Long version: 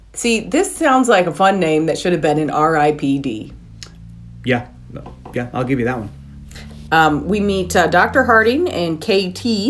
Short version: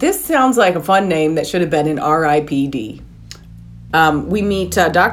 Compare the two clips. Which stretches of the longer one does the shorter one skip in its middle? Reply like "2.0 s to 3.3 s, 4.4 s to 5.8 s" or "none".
4.4 s to 6.9 s